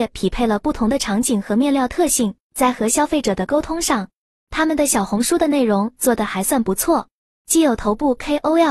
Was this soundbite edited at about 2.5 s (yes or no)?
yes